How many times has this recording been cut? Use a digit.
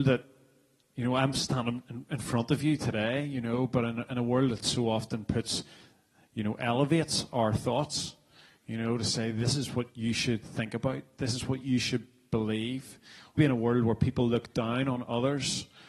1